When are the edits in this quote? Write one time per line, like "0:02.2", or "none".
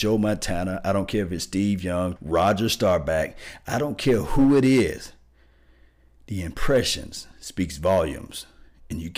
0:02.2

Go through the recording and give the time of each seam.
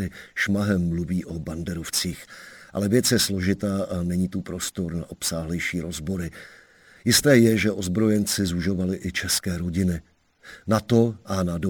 none

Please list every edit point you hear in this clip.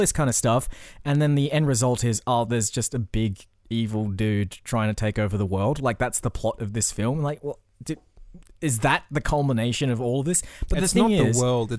none

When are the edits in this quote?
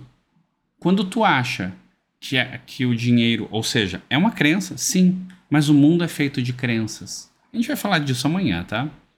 none

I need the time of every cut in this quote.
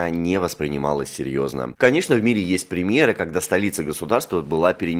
0:01.8

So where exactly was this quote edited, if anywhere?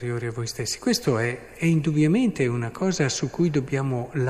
none

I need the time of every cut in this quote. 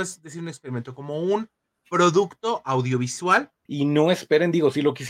0:03.7

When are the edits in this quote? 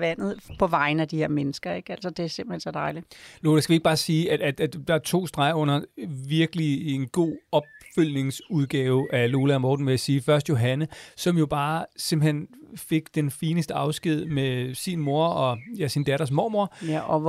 none

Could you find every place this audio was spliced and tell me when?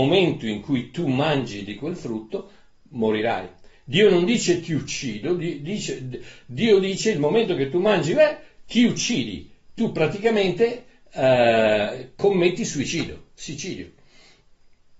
none

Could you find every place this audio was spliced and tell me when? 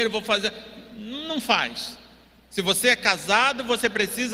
0:02.5

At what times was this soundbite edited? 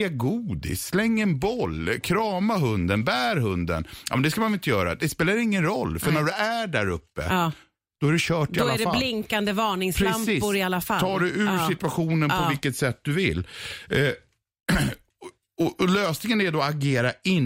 none

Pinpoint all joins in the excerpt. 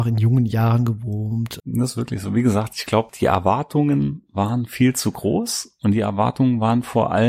0:01.6
0:03.1

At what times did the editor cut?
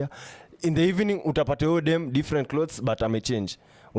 none

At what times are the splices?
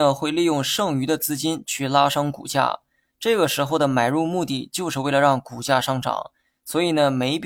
none

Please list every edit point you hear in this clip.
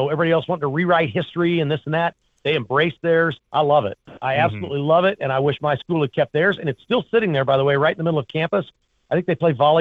0:03.4

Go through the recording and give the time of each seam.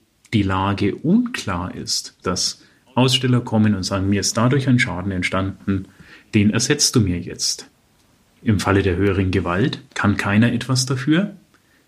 0:02.2

